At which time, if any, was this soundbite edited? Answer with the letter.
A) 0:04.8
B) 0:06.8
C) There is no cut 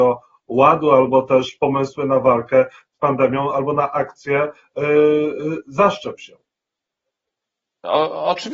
C